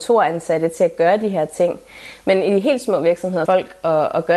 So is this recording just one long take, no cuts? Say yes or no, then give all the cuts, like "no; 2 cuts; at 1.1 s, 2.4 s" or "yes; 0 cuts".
no; 1 cut; at 3.5 s